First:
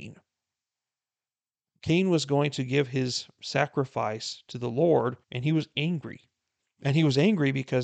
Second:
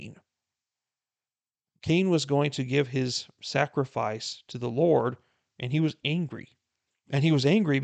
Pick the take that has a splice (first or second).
first